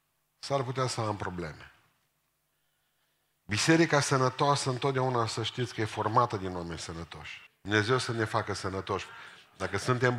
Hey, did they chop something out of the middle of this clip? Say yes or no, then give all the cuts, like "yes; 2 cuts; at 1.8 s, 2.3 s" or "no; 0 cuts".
yes; 1 cut; at 7.5 s